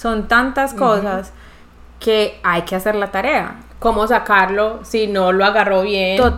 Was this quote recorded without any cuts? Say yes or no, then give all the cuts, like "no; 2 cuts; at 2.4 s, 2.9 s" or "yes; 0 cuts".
yes; 0 cuts